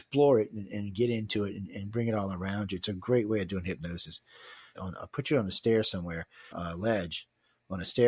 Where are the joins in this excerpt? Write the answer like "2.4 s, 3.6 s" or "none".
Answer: 4.7 s, 6.5 s